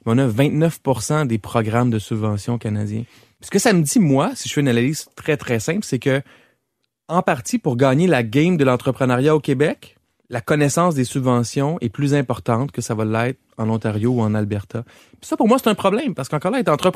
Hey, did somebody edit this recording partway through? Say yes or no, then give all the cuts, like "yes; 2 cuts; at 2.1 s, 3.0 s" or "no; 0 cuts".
no; 0 cuts